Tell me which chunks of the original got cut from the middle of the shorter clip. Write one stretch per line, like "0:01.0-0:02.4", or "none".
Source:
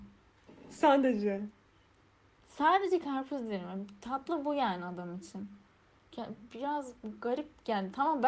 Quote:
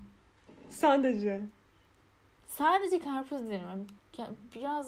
0:04.0-0:06.0